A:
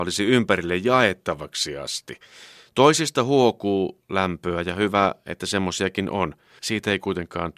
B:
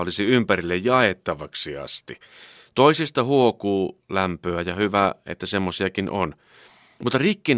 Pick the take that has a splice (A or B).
A